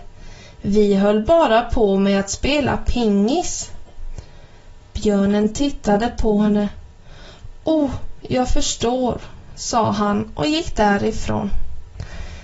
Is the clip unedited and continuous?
yes; 0 cuts

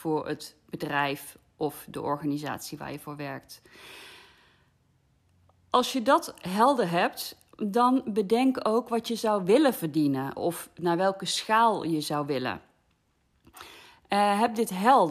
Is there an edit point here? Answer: yes; 1 cut; at 10.4 s

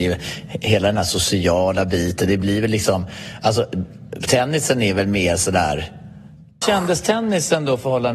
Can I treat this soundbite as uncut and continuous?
no; 1 cut; at 6.6 s

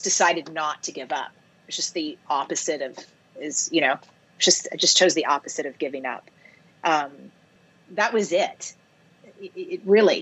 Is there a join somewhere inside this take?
no; 0 cuts

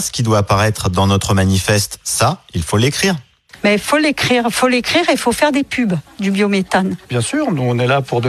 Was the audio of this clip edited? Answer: no; 0 cuts

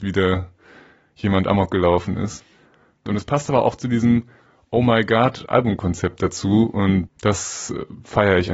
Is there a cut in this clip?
yes; 2 cuts; at 3.1 s, 7.1 s

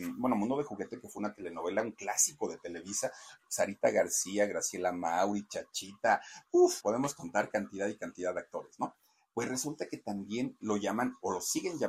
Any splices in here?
yes; 2 cuts; at 6.8 s, 10.6 s

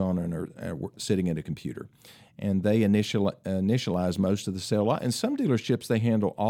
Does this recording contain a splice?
no; 0 cuts

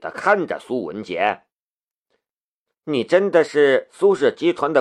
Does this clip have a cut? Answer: yes; 1 cut; at 2.7 s

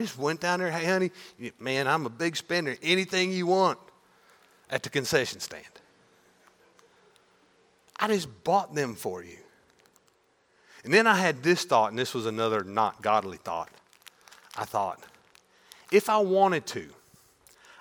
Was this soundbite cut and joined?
no; 0 cuts

